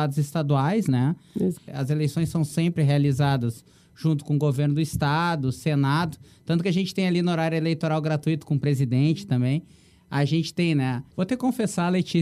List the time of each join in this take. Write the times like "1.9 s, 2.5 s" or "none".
1.5 s, 11.1 s